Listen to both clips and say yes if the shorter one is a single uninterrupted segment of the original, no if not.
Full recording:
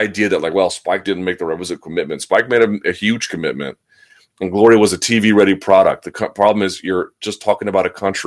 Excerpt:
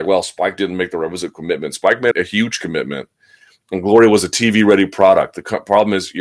no